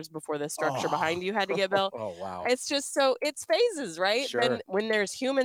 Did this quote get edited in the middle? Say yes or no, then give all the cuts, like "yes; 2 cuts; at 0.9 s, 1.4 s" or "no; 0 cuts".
no; 0 cuts